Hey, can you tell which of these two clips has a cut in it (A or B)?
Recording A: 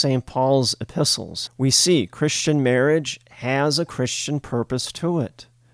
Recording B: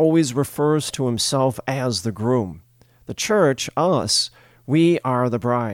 A